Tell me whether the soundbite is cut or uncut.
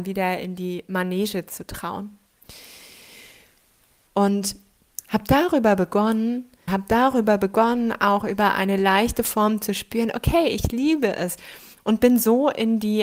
cut